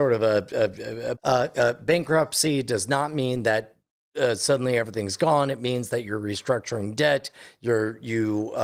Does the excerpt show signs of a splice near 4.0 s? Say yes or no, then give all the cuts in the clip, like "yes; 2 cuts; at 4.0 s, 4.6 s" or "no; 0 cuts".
no; 1 cut; at 1.1 s